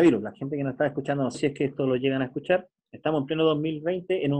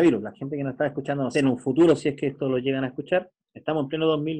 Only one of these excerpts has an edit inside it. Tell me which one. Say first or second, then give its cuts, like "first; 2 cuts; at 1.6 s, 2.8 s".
first; 1 cut; at 1.3 s